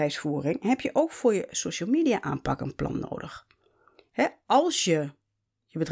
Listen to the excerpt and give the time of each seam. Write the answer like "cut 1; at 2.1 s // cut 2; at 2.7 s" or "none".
none